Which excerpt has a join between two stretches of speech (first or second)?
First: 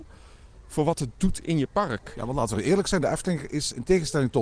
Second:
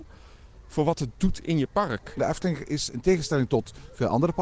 second